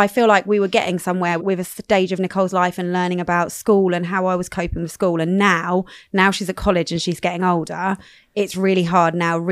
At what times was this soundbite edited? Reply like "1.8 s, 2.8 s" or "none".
1.4 s